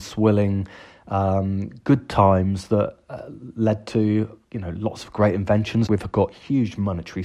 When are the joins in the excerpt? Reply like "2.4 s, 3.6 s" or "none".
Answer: 5.9 s